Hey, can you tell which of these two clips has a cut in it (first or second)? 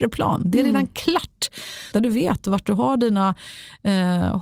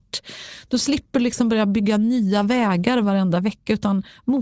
first